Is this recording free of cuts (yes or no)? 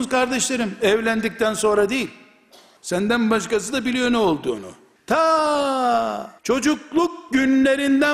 no